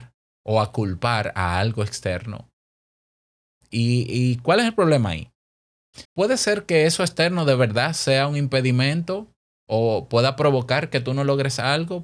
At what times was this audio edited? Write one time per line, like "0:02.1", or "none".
0:06.0